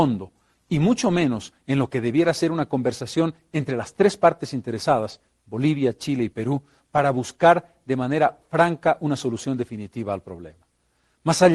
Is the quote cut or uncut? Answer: uncut